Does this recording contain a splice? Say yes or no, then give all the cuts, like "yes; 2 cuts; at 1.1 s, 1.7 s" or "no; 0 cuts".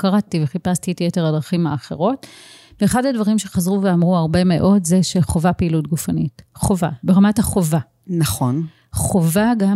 no; 0 cuts